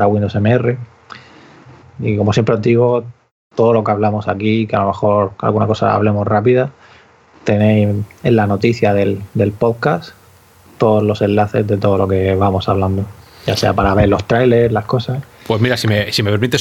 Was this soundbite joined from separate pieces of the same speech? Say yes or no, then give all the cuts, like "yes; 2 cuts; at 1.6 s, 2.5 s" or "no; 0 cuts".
yes; 1 cut; at 1.8 s